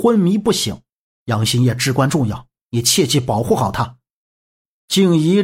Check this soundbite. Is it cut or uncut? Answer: cut